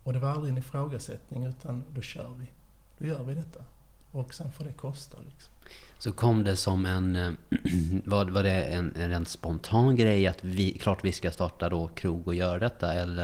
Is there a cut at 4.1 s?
no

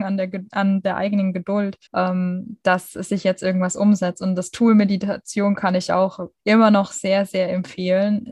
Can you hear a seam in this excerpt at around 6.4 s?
yes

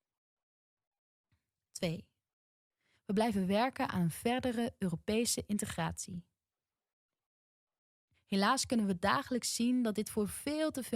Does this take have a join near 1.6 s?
no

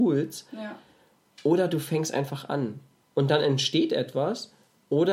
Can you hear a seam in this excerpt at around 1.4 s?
no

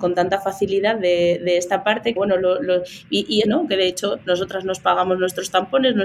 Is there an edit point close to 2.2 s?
yes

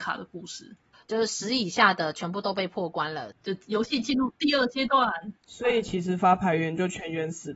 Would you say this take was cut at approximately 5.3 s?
no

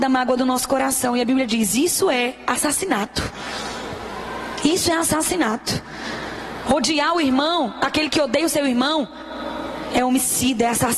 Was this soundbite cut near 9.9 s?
yes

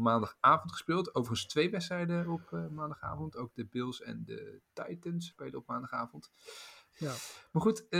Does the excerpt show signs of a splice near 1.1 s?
no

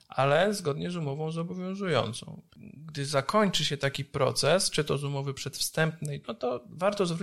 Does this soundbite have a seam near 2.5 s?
yes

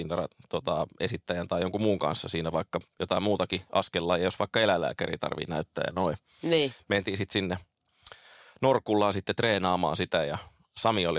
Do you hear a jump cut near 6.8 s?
no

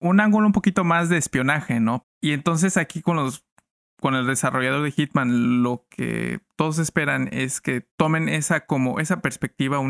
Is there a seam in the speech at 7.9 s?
yes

